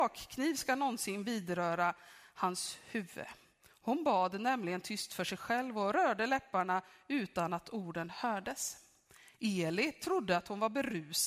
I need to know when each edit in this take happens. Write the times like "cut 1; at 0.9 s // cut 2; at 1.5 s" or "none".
cut 1; at 3.7 s